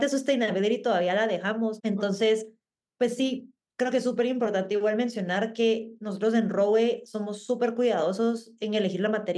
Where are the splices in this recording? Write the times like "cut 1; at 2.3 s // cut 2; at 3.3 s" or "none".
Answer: cut 1; at 1.8 s